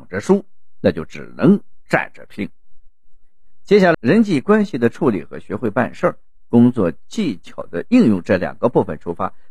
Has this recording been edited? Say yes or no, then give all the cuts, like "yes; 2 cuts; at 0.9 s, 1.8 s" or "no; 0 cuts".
yes; 1 cut; at 3.9 s